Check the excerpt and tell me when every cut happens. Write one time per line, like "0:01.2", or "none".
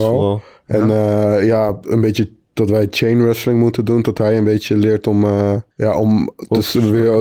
0:05.7